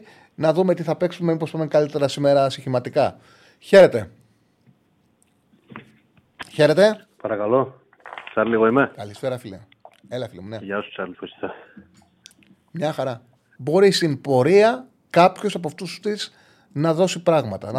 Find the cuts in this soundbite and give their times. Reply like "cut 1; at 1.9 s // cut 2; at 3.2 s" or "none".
cut 1; at 11.1 s // cut 2; at 13.6 s // cut 3; at 15.0 s